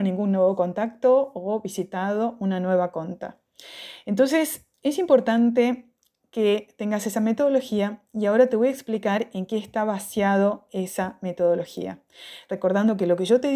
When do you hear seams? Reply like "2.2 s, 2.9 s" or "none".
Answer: none